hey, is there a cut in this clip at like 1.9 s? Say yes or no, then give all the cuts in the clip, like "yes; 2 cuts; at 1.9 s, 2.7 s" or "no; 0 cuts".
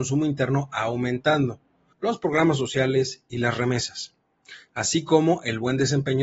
yes; 1 cut; at 1.9 s